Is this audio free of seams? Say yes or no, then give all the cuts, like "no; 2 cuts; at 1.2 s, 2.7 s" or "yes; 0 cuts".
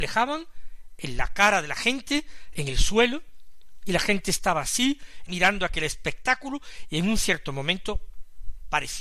no; 2 cuts; at 2.5 s, 5.3 s